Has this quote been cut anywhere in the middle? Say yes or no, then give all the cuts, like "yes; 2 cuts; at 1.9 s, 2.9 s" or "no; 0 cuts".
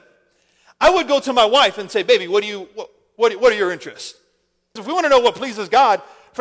yes; 1 cut; at 4.8 s